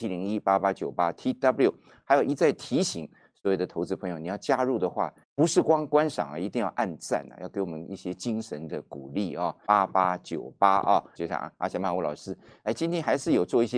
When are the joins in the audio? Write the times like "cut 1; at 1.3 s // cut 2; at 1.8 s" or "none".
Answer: cut 1; at 5.2 s // cut 2; at 9.7 s // cut 3; at 11.2 s